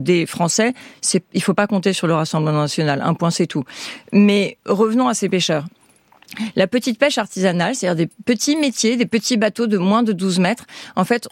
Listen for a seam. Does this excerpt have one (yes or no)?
no